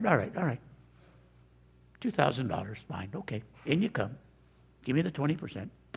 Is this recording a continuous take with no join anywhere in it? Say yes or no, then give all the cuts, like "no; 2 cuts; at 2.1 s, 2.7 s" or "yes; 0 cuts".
yes; 0 cuts